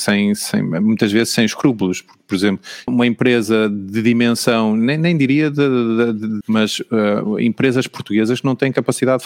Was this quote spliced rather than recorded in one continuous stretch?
yes; 2 cuts; at 2.9 s, 6.4 s

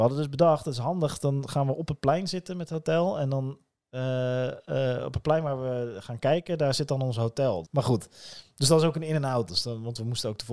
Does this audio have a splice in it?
yes; 2 cuts; at 7.6 s, 9.5 s

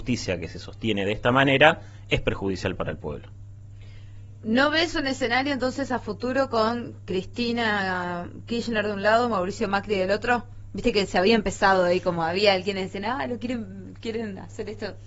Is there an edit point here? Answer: no; 0 cuts

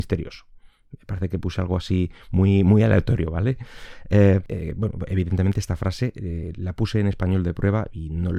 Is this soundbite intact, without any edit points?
yes; 0 cuts

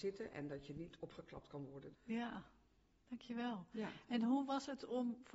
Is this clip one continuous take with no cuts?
no; 1 cut; at 1.9 s

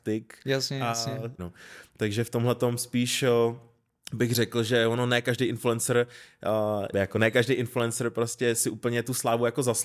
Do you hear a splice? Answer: yes; 2 cuts; at 1.4 s, 6.9 s

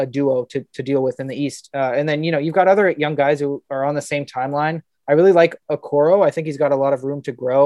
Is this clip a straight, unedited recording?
yes; 0 cuts

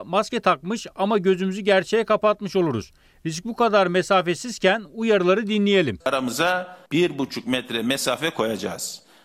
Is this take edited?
yes; 1 cut; at 6.0 s

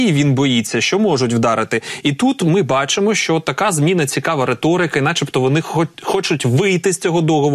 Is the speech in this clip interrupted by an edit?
no; 0 cuts

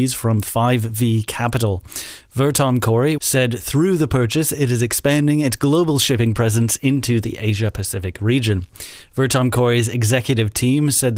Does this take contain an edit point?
yes; 1 cut; at 3.2 s

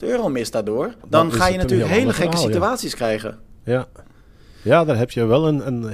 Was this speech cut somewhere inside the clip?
yes; 1 cut; at 1.0 s

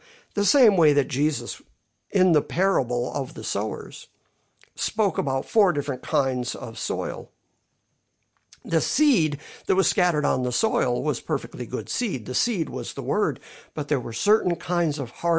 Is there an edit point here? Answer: no; 0 cuts

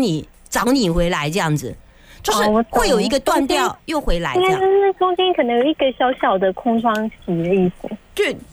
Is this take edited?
no; 0 cuts

